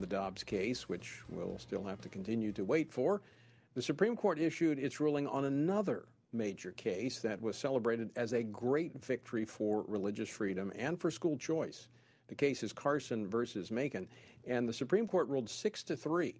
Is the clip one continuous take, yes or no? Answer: yes